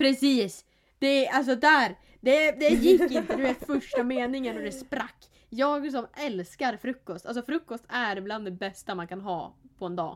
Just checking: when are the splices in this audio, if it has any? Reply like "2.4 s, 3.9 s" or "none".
none